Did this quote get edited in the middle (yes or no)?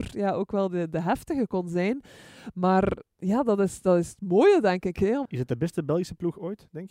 yes